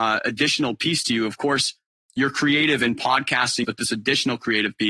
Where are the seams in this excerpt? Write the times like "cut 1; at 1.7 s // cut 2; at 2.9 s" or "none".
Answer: cut 1; at 3.6 s